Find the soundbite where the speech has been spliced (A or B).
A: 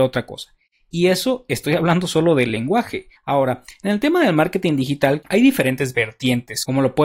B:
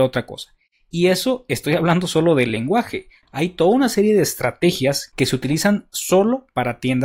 A